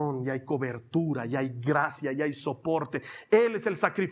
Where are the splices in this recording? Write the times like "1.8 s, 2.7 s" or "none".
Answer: none

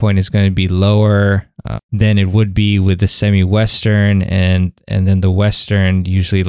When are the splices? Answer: 1.8 s

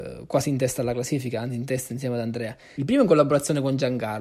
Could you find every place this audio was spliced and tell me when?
2.8 s

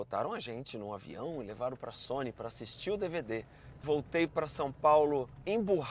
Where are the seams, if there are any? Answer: 3.8 s

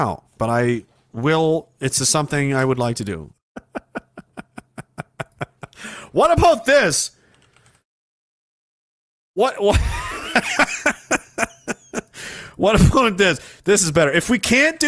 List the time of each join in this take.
3.3 s

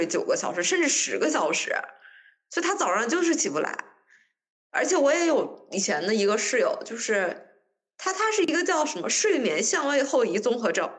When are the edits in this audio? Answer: none

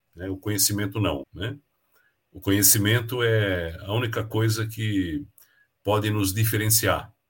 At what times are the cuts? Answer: 1.2 s

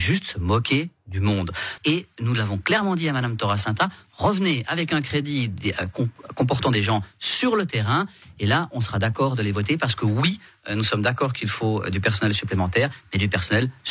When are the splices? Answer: 1.8 s

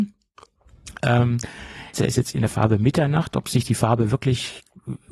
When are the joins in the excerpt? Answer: 1.9 s

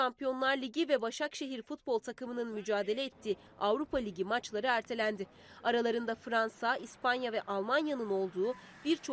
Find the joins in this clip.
6.8 s

